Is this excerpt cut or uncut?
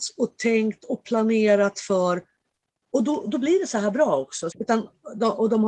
cut